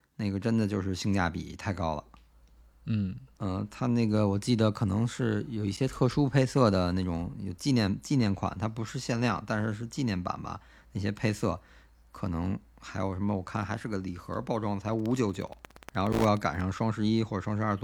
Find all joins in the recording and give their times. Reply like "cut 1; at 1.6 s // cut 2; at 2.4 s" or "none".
none